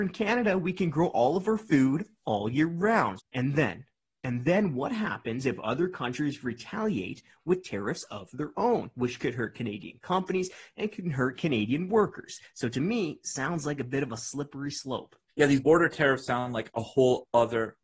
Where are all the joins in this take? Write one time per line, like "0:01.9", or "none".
0:03.2